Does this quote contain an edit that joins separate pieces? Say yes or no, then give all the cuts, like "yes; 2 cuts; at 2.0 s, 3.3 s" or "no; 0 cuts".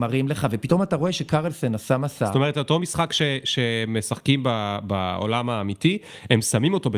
no; 0 cuts